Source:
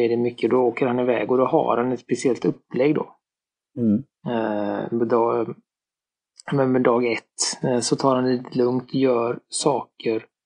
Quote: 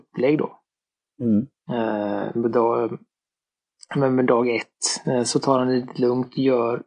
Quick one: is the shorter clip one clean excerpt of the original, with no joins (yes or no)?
yes